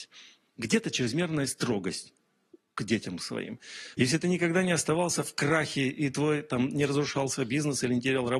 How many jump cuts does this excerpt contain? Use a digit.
1